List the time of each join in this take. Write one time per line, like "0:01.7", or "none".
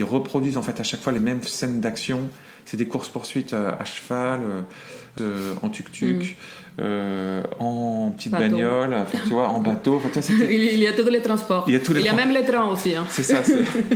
0:05.2